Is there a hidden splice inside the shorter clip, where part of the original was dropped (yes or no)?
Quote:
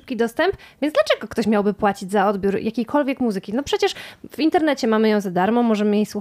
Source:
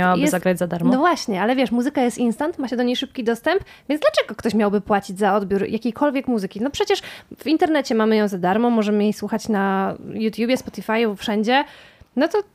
no